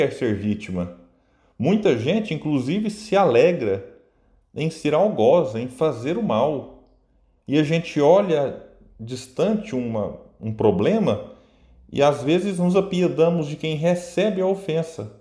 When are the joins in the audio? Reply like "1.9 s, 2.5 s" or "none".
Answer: none